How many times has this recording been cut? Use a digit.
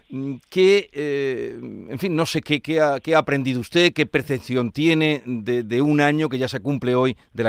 0